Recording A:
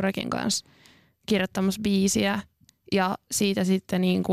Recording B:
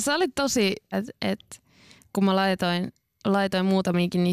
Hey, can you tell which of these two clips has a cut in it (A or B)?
B